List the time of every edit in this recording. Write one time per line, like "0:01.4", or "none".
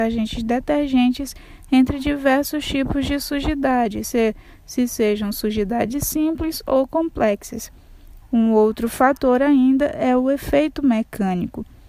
0:04.0
0:08.2